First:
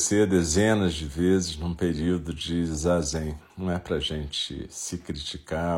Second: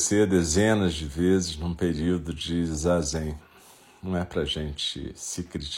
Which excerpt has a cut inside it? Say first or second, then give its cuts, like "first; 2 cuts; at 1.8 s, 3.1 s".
first; 1 cut; at 3.5 s